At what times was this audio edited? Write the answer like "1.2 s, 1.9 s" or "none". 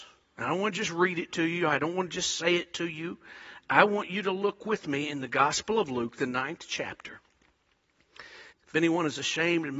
8.5 s